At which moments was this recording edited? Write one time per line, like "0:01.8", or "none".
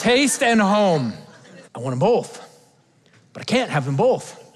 0:01.6

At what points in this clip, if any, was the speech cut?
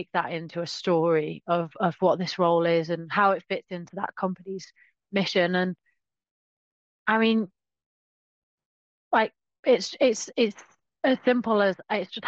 none

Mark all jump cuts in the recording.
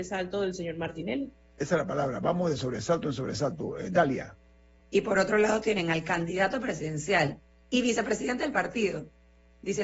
0:04.8

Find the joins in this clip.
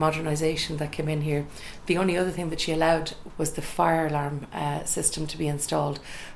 0:03.3

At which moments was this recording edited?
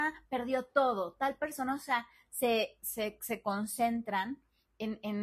none

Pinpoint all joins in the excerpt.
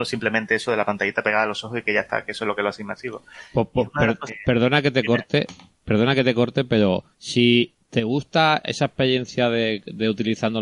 0:04.3
0:07.1
0:08.6

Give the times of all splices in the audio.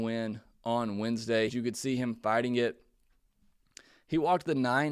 0:01.5

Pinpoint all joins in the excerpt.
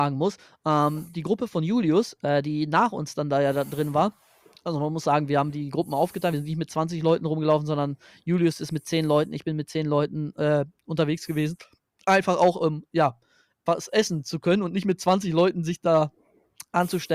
none

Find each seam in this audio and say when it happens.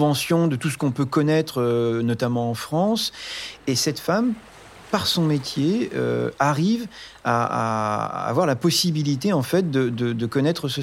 0:03.6

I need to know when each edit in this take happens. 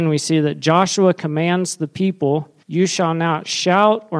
0:02.6

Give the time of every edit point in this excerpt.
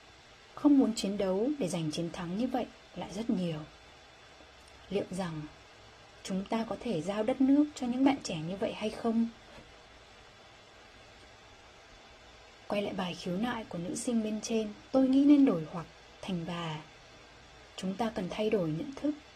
0:14.9
0:17.7

